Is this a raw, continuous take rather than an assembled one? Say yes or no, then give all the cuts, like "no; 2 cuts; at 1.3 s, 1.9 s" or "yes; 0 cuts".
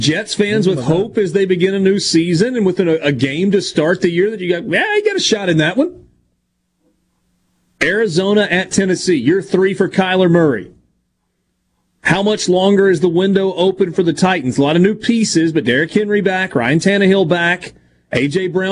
yes; 0 cuts